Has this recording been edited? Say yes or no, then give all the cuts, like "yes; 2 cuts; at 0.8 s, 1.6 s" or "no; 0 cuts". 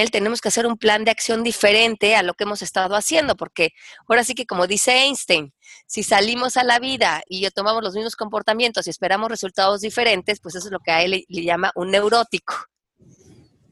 yes; 1 cut; at 7.3 s